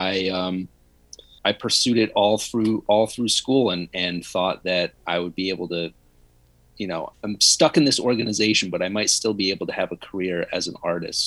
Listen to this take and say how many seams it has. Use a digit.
1